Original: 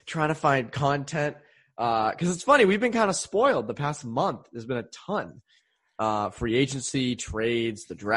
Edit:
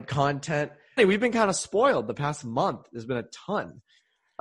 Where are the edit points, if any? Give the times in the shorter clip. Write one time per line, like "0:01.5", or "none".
0:01.0

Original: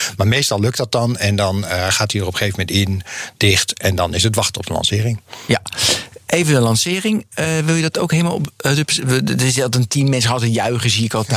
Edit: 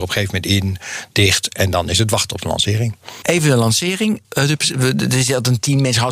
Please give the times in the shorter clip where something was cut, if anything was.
0:03.2
0:04.2

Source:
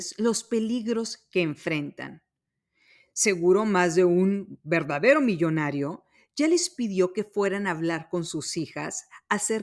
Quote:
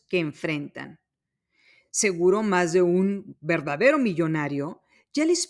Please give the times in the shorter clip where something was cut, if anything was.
none

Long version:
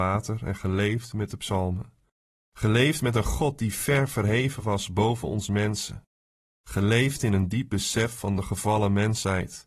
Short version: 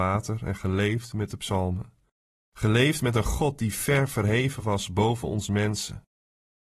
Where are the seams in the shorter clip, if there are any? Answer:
none

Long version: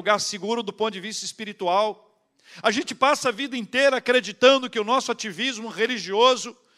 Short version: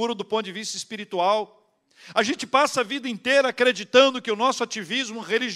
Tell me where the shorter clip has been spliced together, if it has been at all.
none

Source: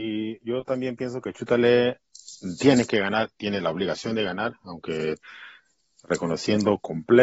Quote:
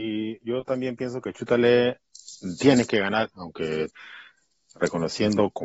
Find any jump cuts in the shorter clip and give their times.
0:03.3

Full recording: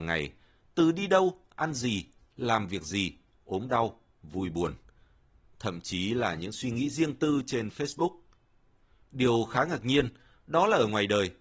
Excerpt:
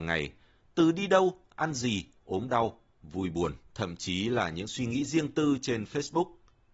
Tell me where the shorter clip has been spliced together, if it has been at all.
0:02.2
0:03.6

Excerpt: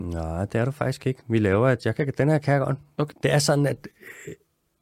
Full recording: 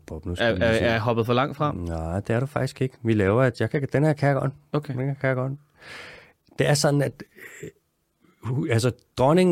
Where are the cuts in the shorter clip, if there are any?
0:03.1

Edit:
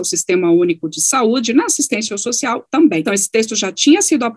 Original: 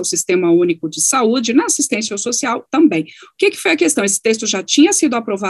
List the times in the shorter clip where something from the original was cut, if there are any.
0:03.0

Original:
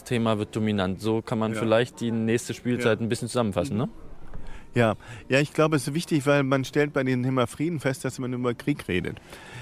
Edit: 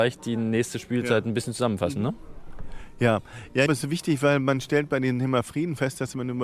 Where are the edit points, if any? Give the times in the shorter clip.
0:03.7

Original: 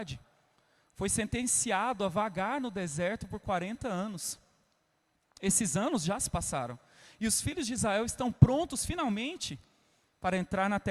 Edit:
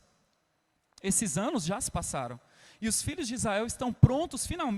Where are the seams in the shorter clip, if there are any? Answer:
none

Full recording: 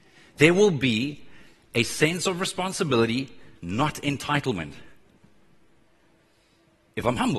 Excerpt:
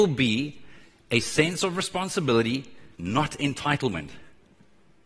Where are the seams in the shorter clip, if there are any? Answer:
none

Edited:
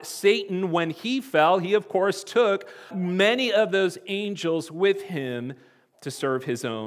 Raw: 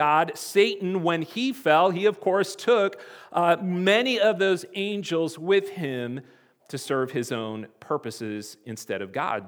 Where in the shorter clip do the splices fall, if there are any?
0:02.9

